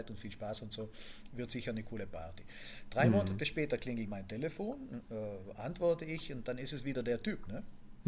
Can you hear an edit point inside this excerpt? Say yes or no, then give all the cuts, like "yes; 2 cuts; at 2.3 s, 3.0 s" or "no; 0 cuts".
no; 0 cuts